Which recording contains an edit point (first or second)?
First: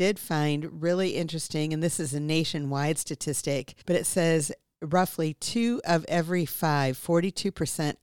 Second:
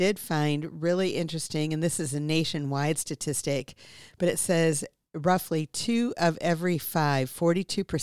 first